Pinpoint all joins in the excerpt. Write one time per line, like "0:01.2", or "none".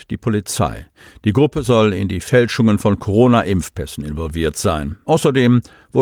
0:05.0